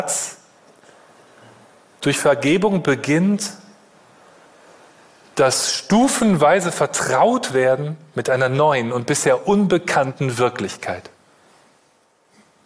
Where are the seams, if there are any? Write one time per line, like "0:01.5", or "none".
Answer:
none